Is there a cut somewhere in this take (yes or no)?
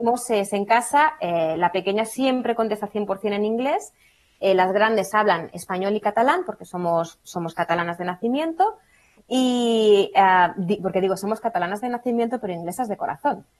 no